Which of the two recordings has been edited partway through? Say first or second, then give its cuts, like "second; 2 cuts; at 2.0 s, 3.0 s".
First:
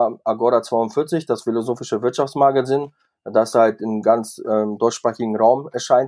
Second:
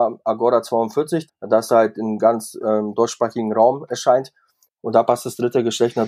second; 2 cuts; at 1.3 s, 4.7 s